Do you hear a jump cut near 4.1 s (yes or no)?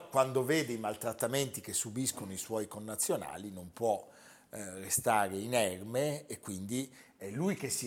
no